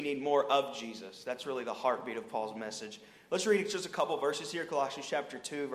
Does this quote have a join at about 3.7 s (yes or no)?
no